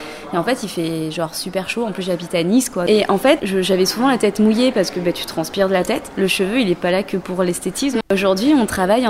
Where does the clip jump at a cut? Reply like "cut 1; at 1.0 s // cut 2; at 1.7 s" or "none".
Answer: cut 1; at 3.4 s // cut 2; at 8.0 s